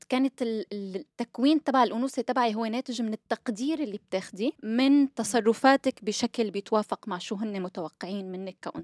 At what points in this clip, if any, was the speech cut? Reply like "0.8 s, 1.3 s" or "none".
4.6 s